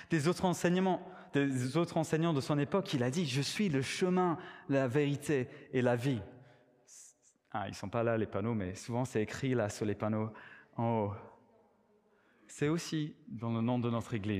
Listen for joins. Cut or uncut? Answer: uncut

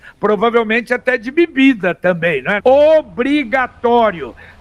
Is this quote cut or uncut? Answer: cut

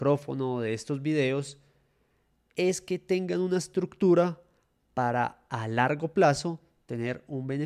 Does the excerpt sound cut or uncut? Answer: uncut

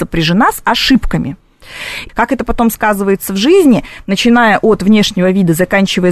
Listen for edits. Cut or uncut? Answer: cut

